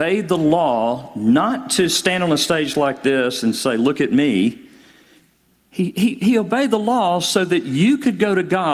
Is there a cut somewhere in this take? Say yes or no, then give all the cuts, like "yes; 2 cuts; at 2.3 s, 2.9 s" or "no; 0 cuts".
no; 0 cuts